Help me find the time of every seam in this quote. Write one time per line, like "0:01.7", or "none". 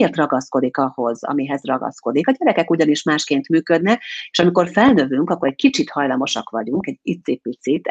none